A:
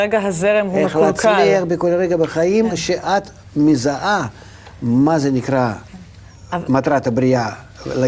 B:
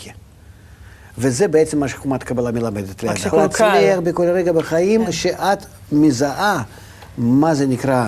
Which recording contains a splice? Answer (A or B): B